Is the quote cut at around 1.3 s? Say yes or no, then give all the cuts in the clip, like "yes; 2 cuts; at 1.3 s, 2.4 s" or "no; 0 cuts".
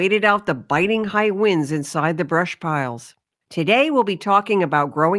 no; 1 cut; at 3.4 s